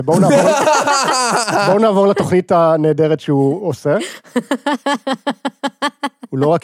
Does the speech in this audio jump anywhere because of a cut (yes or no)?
no